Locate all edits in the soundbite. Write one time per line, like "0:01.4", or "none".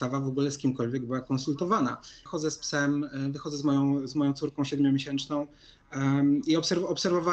0:02.3